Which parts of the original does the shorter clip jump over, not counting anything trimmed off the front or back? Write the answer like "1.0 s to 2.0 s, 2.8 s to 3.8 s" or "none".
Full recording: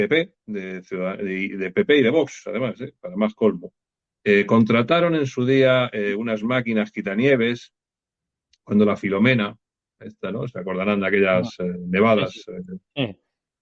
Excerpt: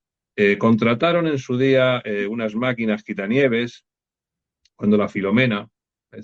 none

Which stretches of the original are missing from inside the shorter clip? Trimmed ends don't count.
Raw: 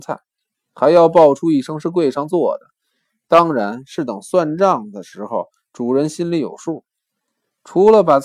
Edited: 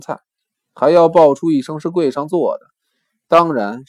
none

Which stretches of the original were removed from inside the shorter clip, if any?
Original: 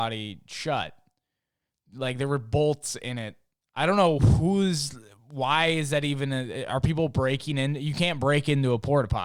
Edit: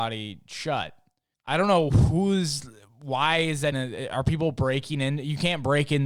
1.3 s to 3.6 s, 6.0 s to 6.3 s

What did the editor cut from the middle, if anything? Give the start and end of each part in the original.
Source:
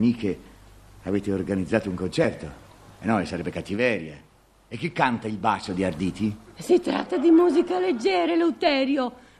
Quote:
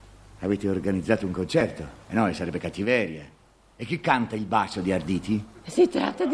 2.7 s to 2.9 s

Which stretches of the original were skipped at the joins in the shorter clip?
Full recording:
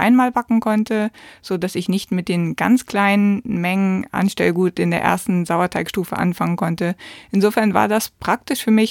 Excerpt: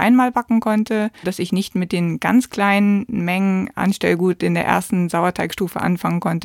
1.2 s to 1.6 s

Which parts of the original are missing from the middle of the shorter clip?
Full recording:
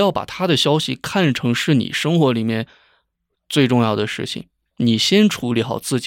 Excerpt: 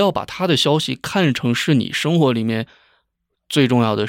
none

